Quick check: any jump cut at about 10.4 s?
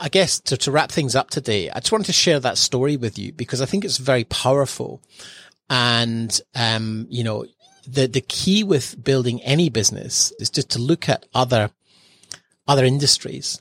yes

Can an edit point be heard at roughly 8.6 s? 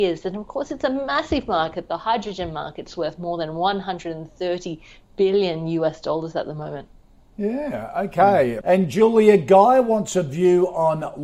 yes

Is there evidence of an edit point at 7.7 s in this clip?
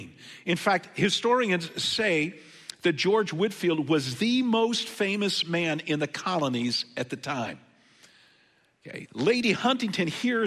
no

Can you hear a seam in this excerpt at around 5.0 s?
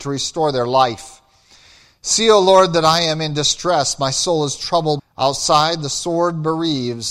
yes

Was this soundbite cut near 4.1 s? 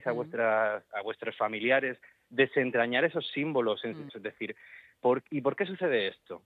yes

